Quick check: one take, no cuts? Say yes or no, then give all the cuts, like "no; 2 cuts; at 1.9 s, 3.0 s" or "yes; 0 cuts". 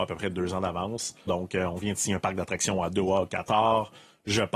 no; 1 cut; at 1.3 s